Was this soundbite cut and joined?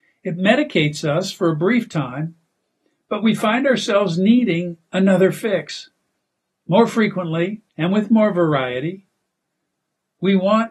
yes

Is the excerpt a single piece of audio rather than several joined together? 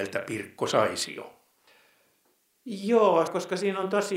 no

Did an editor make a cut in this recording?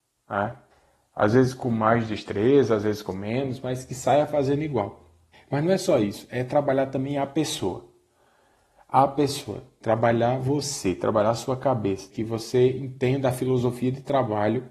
yes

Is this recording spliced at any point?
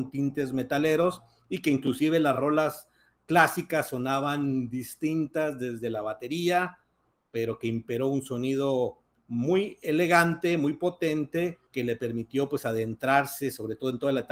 yes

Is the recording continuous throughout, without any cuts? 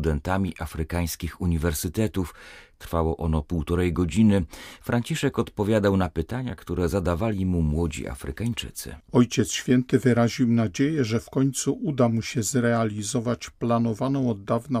yes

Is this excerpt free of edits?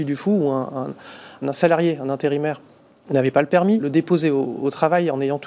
no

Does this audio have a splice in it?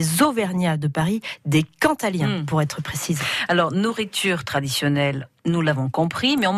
yes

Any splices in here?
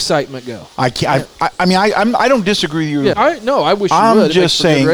yes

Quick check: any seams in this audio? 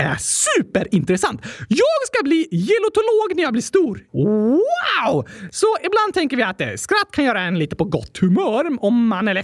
yes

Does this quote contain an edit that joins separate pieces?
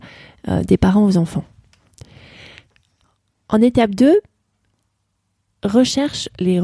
no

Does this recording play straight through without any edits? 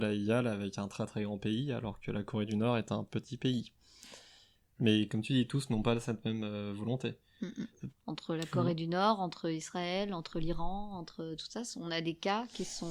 no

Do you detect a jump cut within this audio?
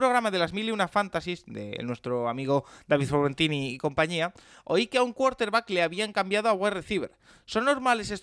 no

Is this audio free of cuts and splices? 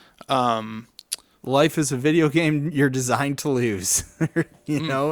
no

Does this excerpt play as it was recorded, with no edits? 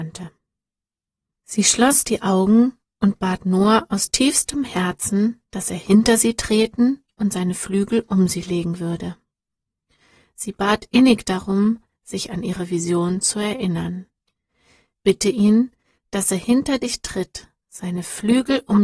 no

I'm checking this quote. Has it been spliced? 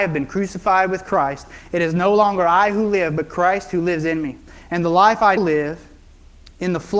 yes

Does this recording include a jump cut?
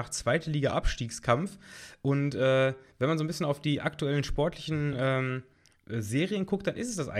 no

